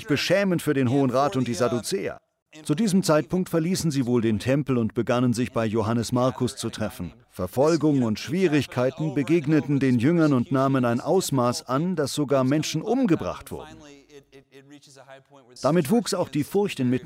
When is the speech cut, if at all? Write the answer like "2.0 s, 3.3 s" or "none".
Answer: 2.6 s, 7.2 s, 15.6 s